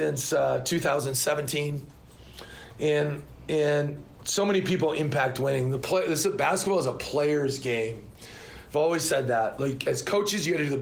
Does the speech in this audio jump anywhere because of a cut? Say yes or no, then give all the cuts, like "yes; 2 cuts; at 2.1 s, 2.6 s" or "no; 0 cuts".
no; 0 cuts